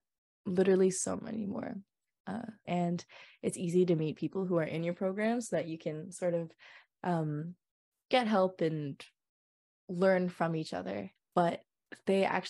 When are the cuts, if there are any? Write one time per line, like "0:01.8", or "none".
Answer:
0:02.6
0:11.2